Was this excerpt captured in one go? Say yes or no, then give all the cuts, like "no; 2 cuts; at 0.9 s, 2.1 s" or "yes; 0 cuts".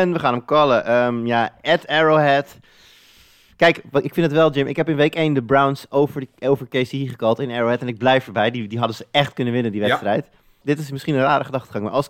no; 1 cut; at 10.6 s